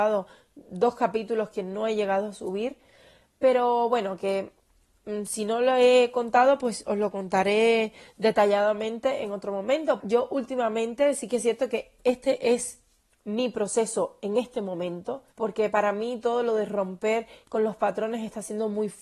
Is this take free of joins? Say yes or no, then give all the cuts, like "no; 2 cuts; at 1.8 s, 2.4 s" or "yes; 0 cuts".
no; 2 cuts; at 10.0 s, 15.3 s